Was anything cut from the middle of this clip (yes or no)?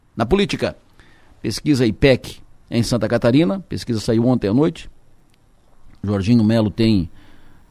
no